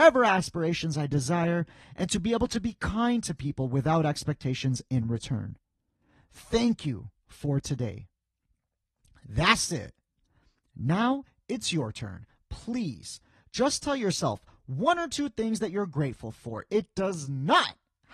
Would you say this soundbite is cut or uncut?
uncut